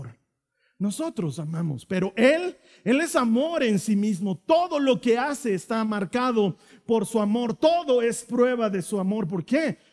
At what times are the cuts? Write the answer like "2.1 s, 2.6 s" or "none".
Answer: none

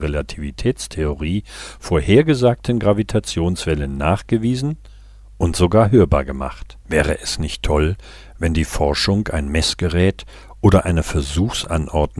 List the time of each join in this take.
6.8 s

